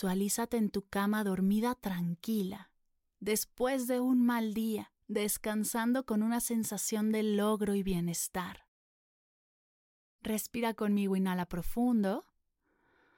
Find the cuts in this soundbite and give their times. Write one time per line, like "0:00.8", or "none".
0:05.0